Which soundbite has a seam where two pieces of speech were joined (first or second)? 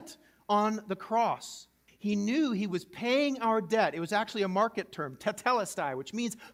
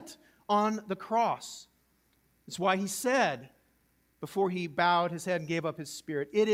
first